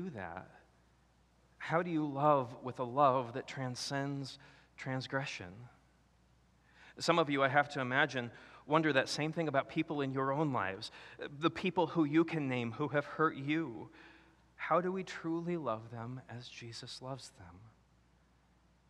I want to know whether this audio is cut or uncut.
uncut